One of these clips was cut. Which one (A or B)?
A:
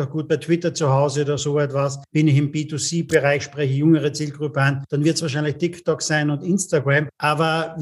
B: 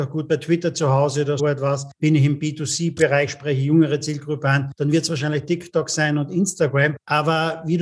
B